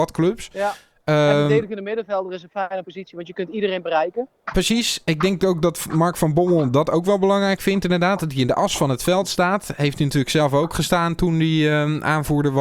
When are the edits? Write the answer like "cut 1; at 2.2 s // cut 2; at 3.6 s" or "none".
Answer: none